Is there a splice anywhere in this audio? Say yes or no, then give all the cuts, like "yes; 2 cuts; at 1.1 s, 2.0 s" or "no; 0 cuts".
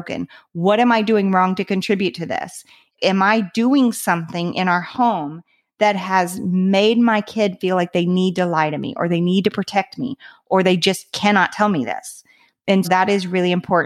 yes; 1 cut; at 12.8 s